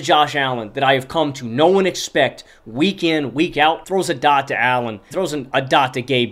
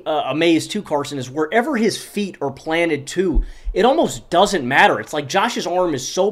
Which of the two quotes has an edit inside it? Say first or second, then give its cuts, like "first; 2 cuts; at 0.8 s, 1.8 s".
first; 2 cuts; at 3.8 s, 5.1 s